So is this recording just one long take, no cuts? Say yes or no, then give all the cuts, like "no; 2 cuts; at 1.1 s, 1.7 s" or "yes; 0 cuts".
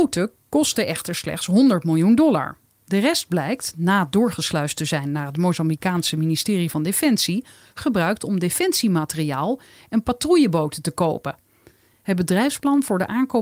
yes; 0 cuts